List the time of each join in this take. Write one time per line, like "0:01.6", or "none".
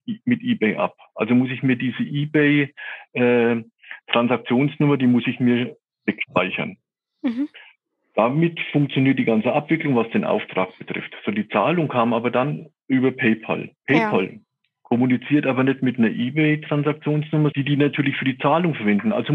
0:13.8
0:17.5